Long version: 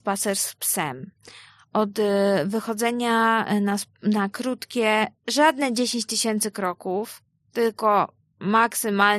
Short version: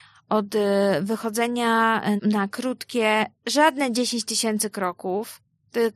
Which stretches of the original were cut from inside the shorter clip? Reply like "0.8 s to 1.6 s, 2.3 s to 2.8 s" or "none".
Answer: 3.6 s to 4.0 s